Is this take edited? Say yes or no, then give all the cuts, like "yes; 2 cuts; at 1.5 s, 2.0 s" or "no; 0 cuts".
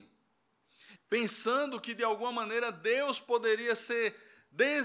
yes; 1 cut; at 0.9 s